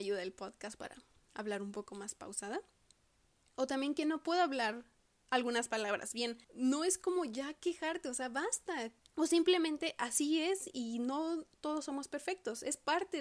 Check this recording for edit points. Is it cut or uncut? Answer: cut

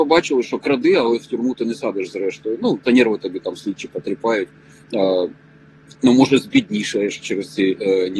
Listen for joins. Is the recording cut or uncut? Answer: cut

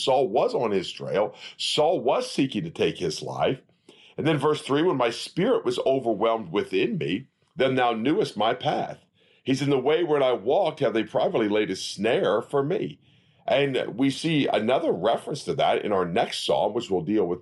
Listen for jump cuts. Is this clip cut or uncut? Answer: uncut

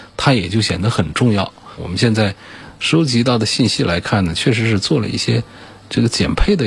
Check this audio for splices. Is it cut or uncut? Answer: cut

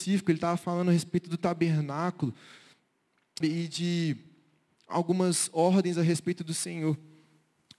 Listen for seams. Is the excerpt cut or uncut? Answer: cut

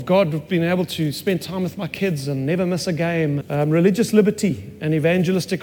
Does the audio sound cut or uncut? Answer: cut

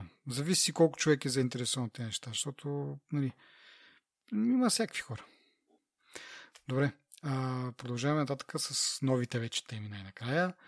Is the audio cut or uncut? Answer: uncut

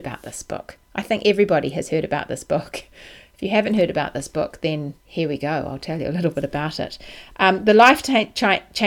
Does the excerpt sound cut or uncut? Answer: cut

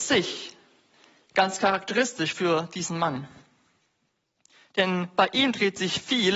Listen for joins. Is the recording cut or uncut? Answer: uncut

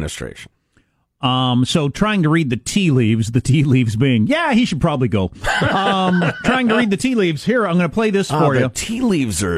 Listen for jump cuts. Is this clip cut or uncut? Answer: uncut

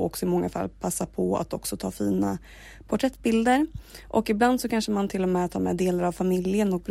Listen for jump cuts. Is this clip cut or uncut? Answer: uncut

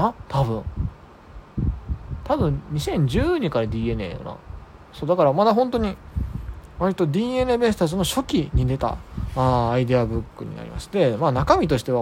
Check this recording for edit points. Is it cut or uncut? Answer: uncut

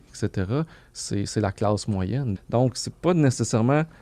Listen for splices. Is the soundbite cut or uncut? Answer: cut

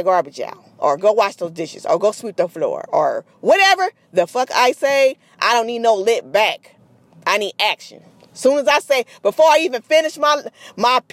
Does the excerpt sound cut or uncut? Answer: uncut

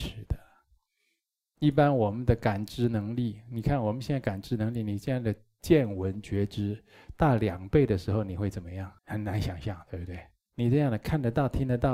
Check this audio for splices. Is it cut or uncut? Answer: cut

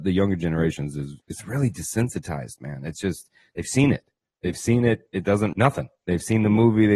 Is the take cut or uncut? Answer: cut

